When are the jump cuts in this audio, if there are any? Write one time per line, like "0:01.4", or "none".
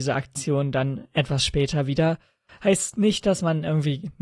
0:02.5